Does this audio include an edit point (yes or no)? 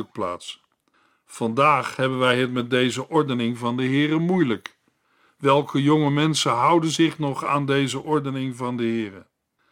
no